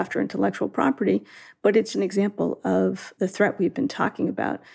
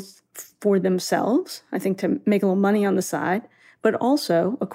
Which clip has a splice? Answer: first; 1 cut; at 1.9 s

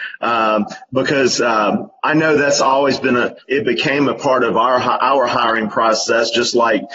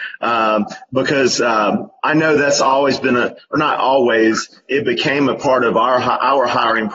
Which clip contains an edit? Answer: first; 1 cut; at 3.4 s

